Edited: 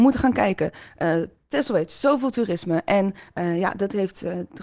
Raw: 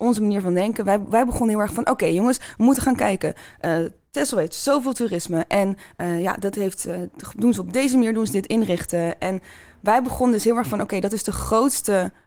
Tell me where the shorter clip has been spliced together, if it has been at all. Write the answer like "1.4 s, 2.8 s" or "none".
none